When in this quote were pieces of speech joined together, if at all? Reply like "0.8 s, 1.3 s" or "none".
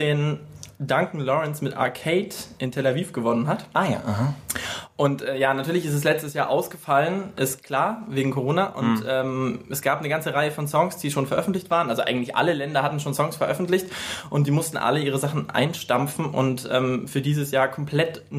none